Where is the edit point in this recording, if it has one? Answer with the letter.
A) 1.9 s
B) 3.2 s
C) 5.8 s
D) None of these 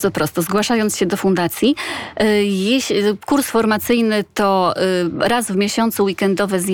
D